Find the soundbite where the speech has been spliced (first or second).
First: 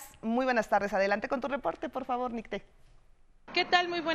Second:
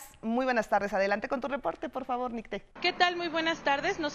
second